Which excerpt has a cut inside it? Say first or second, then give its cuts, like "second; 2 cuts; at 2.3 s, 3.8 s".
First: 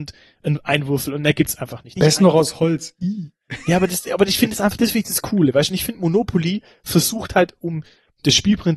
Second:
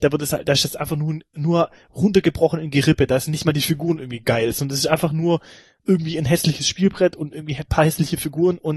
first; 1 cut; at 2.0 s